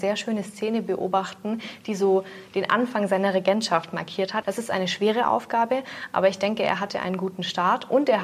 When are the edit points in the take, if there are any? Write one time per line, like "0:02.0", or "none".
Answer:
0:04.4